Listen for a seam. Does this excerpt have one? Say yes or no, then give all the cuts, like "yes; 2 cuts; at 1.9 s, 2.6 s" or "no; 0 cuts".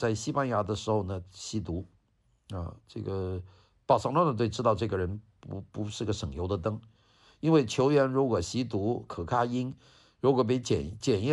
no; 0 cuts